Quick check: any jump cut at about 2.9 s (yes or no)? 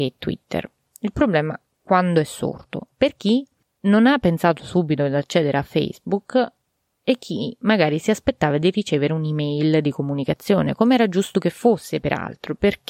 yes